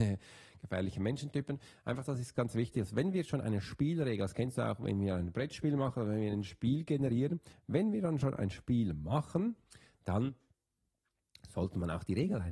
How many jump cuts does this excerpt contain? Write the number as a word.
one